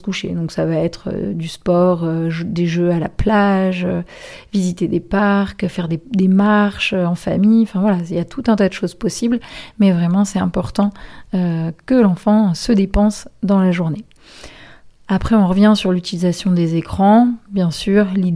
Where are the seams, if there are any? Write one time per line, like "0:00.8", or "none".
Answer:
none